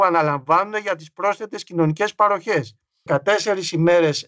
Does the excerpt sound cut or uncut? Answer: cut